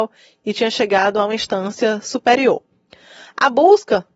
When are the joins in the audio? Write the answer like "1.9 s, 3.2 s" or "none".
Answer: none